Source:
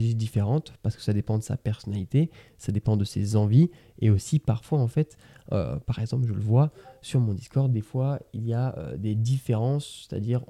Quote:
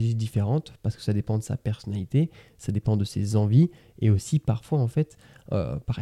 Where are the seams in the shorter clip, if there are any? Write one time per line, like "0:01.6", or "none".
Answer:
none